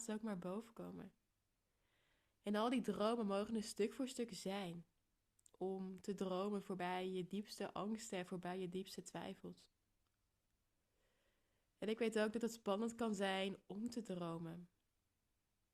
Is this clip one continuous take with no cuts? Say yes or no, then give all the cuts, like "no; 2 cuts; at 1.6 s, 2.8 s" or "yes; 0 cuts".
yes; 0 cuts